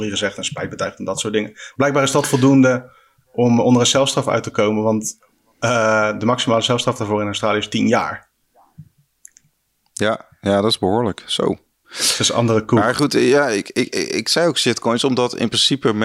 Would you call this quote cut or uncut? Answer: uncut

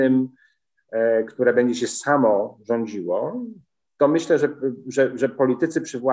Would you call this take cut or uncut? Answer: uncut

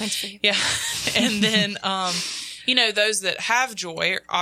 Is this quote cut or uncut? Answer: uncut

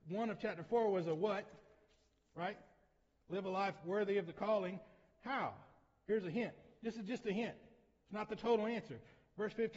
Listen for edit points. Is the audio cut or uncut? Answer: uncut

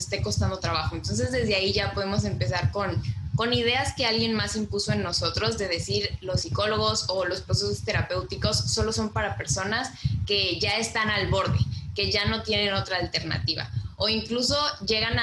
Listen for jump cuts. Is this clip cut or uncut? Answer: uncut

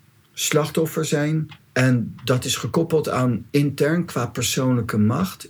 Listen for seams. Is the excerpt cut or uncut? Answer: cut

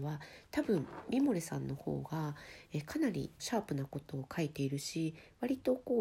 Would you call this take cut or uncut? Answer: cut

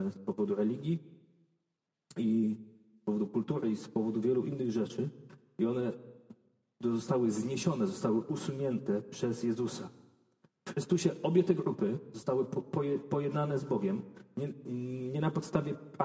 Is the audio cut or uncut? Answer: uncut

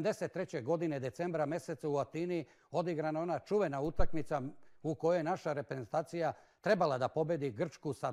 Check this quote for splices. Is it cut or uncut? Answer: uncut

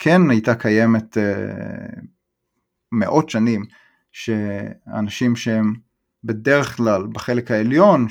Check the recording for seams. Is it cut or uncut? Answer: uncut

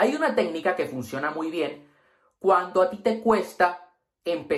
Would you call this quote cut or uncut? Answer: uncut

